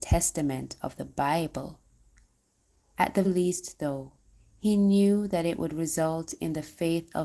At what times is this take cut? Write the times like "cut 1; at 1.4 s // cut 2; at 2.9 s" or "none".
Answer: cut 1; at 3.2 s